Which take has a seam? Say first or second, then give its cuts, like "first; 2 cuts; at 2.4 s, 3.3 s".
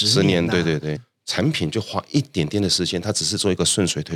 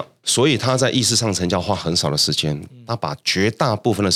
first; 1 cut; at 1.0 s